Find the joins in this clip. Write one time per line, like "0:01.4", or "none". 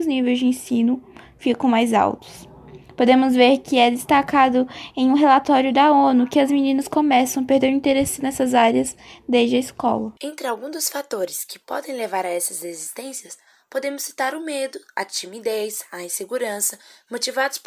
0:10.2